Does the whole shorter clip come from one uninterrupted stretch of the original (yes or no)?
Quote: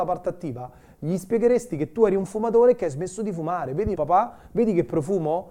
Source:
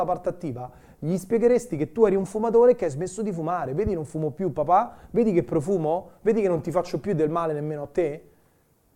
no